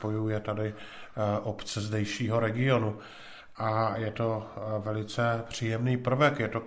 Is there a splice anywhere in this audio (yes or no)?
no